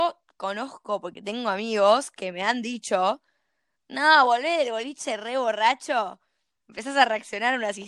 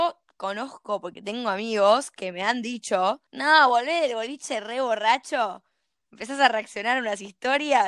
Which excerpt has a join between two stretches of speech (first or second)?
second